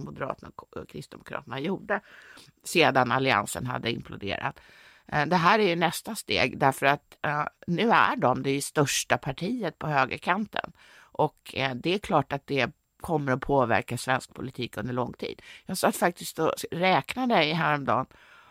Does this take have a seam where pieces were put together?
no; 0 cuts

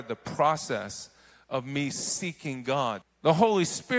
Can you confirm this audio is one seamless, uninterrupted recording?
no; 1 cut; at 3.0 s

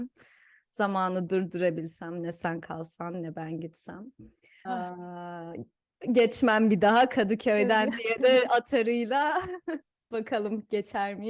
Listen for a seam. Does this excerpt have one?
yes; 1 cut; at 4.6 s

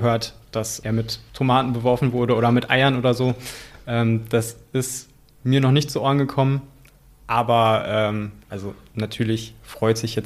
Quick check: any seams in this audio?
no; 0 cuts

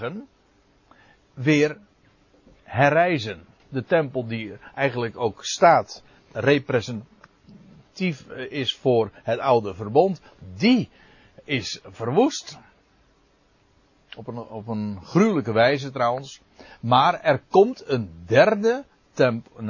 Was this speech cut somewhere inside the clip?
yes; 1 cut; at 3.6 s

